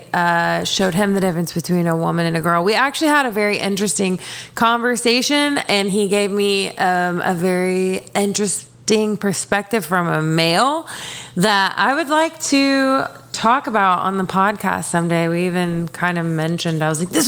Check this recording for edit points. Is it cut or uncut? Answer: uncut